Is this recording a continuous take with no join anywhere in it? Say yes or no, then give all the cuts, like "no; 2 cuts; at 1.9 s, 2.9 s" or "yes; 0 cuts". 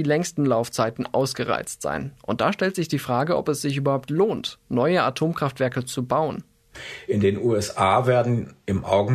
yes; 0 cuts